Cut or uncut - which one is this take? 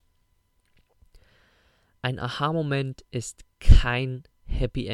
uncut